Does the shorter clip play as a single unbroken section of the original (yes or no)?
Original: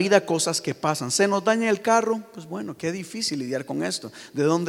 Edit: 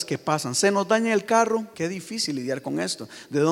no